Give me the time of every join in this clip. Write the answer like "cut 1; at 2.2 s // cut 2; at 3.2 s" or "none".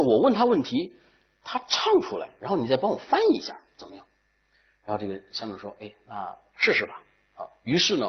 none